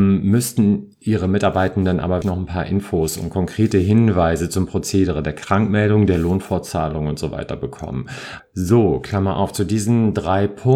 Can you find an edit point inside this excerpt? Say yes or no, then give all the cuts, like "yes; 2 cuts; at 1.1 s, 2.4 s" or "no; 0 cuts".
yes; 2 cuts; at 2.2 s, 8.4 s